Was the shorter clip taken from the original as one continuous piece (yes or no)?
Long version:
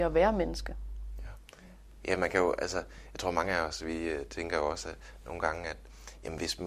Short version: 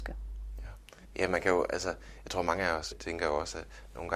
no